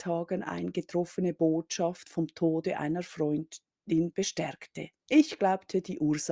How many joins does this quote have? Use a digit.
1